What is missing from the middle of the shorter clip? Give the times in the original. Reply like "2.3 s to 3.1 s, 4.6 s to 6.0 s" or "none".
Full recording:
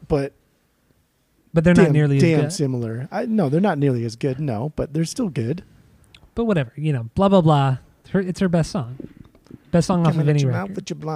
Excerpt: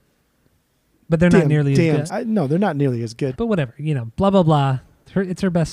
2.5 s to 3.1 s, 4.3 s to 6.3 s

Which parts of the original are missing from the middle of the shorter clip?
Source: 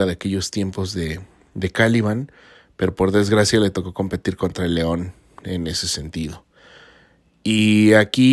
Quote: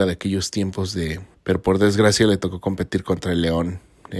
1.3 s to 2.7 s

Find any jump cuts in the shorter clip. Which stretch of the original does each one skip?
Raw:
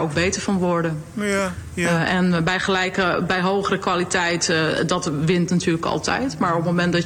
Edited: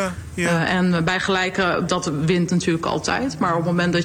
3.3 s to 4.9 s

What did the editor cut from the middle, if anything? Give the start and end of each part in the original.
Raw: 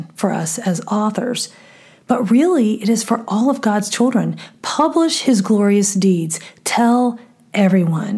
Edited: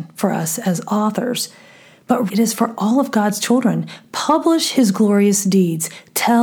2.3 s to 2.8 s

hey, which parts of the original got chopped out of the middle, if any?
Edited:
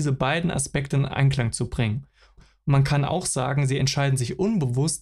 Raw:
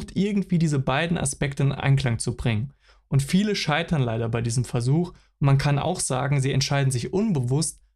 3.0 s to 5.1 s

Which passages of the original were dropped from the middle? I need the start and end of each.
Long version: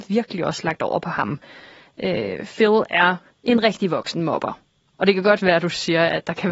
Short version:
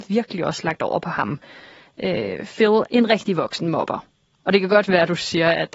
2.9 s to 3.4 s

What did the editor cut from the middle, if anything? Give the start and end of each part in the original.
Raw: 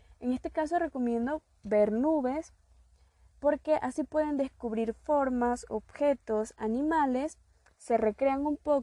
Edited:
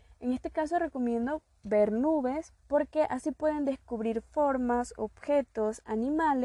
2.6 s to 3.3 s

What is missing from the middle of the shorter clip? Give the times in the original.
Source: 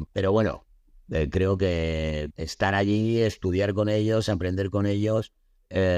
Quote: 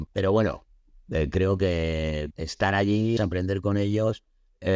3.2 s to 4.3 s

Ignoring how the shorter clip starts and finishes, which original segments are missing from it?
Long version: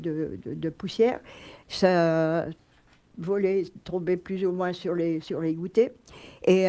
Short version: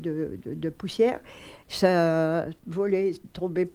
2.6 s to 3.1 s

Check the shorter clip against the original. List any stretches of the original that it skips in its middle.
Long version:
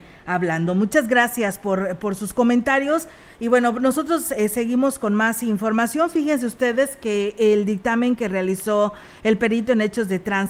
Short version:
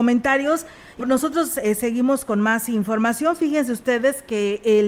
3.4 s to 3.7 s

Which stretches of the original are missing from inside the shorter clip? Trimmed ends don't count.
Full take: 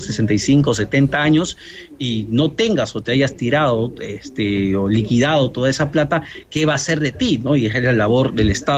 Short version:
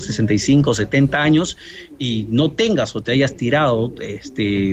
none

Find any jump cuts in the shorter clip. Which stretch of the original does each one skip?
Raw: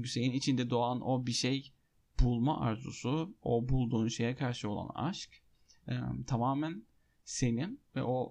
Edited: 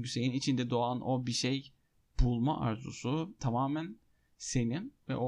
3.4 s to 6.3 s

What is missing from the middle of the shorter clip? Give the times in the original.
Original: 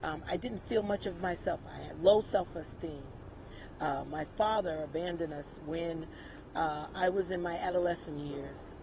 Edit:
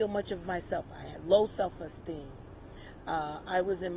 3.8 s to 6.5 s

